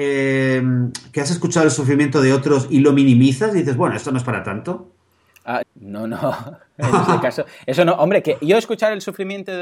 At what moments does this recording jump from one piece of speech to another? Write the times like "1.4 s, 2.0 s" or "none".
5.6 s